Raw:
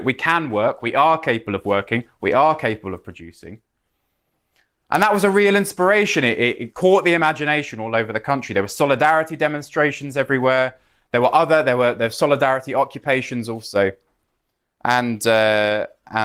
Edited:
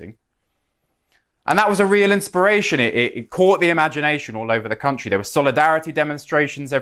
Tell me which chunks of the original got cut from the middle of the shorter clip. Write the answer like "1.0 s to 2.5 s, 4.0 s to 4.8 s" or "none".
none

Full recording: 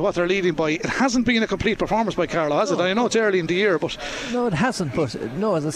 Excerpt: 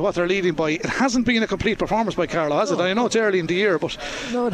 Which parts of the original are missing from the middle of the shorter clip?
none

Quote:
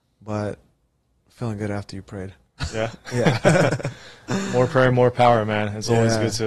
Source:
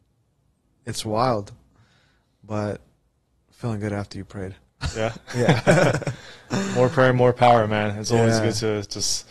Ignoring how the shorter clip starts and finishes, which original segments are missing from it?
none

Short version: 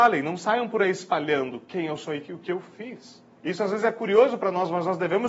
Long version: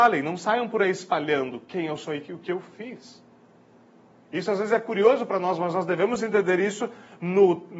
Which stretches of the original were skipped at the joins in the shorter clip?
3.4 s to 4.2 s

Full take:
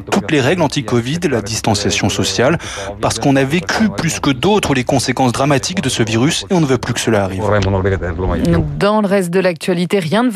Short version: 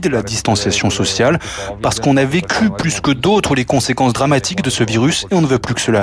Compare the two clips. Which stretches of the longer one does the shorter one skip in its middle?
none

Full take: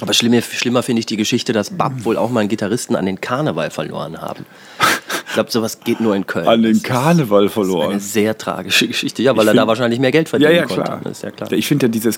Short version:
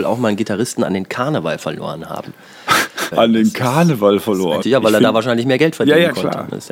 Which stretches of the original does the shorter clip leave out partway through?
5.2 s to 6.4 s, 7.9 s to 9.1 s

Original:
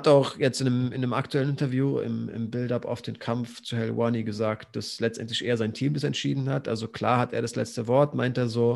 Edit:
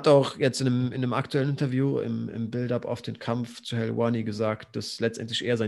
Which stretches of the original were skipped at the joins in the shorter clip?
none

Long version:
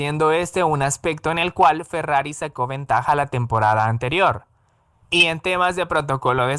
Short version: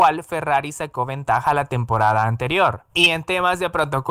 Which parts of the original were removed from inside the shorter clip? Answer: 4.5 s to 5.1 s

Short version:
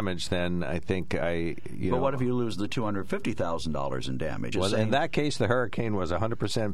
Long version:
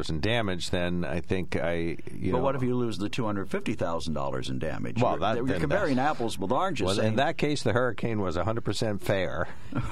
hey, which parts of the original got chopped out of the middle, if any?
4.9 s to 6.8 s

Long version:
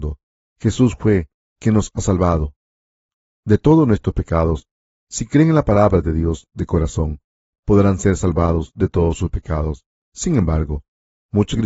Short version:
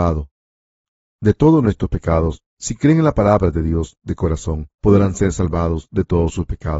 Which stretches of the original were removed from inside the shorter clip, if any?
4.7 s to 5.0 s, 7.2 s to 7.6 s

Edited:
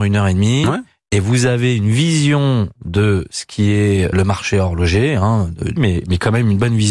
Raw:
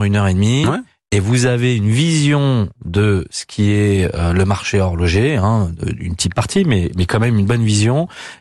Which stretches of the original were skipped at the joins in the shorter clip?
4.1 s to 4.3 s, 6.0 s to 6.6 s

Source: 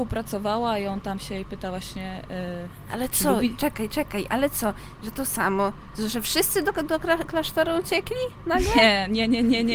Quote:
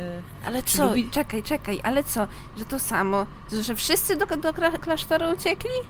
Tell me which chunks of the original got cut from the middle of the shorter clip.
none

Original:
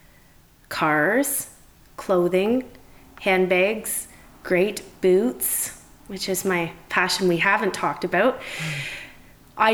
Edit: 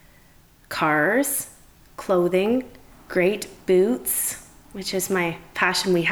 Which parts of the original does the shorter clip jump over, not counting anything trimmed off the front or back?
2.9 s to 4.3 s

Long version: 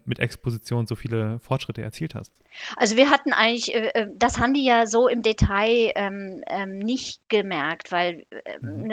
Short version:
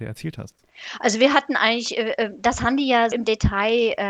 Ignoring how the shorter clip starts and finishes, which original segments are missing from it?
4.9 s to 5.1 s

